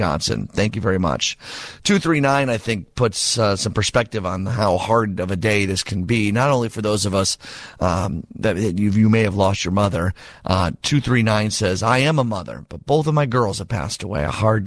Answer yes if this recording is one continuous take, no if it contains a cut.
yes